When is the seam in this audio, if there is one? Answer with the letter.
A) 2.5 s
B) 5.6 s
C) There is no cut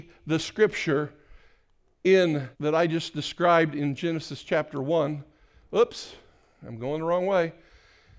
A